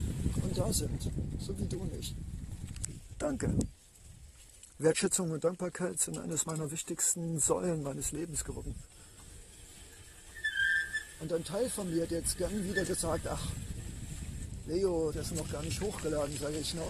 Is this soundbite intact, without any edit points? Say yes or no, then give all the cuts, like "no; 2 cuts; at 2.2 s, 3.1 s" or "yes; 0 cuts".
no; 1 cut; at 15.1 s